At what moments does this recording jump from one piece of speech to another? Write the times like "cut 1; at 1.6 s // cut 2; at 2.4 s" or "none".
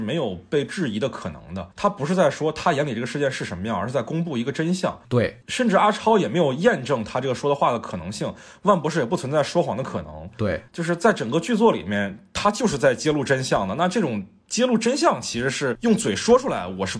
none